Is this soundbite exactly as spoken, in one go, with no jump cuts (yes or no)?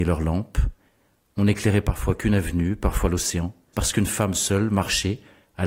no